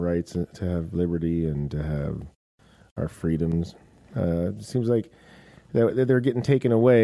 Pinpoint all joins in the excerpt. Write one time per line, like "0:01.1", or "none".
none